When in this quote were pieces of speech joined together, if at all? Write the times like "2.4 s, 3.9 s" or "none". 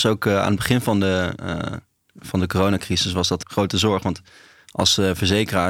3.4 s